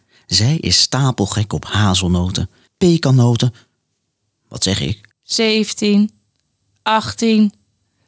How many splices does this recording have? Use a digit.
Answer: 2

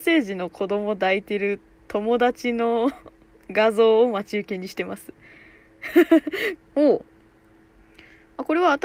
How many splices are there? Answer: 1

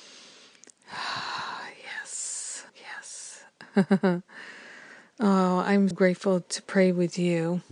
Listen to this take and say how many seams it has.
2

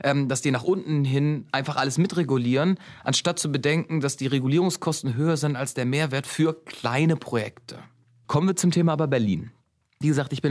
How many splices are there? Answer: 1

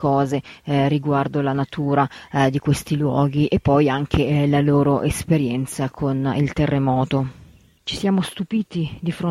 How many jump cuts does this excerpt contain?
1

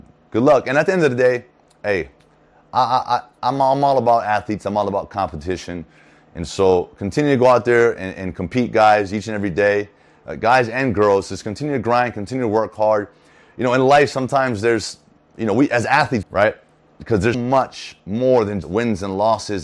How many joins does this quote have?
3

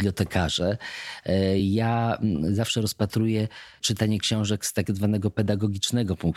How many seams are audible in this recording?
0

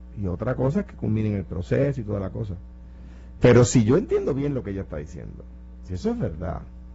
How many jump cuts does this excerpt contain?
1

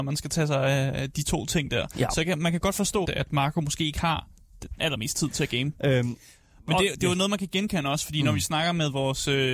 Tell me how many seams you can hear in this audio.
2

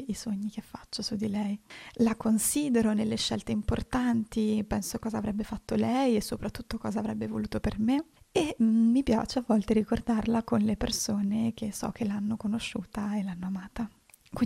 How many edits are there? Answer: 0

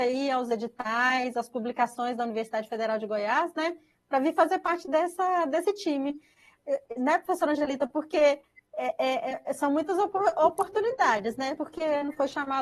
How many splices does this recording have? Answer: 1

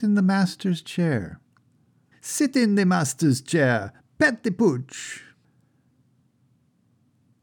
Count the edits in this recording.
1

